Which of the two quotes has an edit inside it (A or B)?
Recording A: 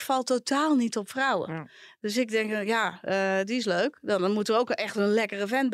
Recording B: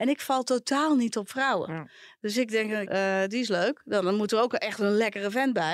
B